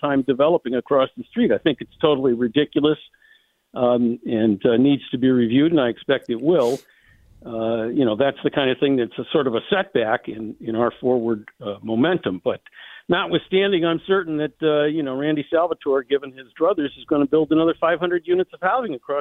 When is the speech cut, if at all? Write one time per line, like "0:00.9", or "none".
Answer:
none